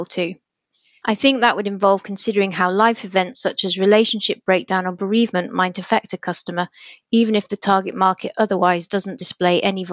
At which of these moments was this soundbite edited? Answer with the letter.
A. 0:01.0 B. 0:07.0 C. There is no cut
A